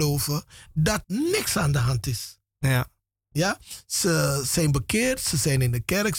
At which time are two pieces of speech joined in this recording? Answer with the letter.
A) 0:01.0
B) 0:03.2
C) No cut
A